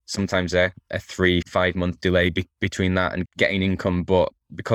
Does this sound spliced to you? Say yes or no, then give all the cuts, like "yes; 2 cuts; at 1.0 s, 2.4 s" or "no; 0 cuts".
yes; 2 cuts; at 1.4 s, 3.2 s